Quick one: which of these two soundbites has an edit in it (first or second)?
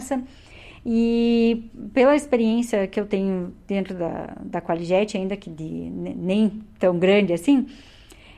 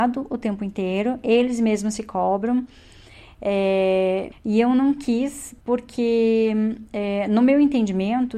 second